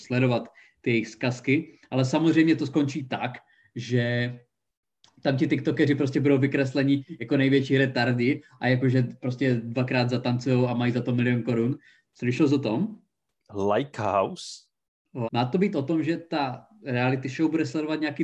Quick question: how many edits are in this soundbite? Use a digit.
2